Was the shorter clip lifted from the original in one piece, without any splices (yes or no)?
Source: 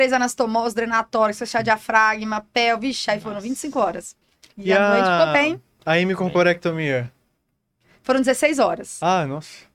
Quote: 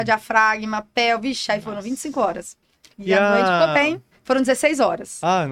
no